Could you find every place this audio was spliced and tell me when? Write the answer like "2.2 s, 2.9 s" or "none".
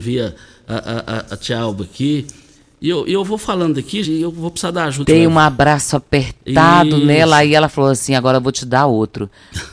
1.3 s, 4.0 s, 5.0 s